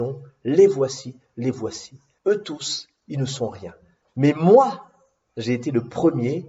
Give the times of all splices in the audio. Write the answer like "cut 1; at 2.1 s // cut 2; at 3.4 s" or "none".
cut 1; at 2.2 s // cut 2; at 4.0 s